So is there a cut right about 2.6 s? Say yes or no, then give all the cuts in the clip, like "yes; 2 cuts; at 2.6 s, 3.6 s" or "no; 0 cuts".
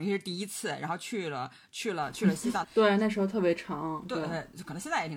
yes; 1 cut; at 2.6 s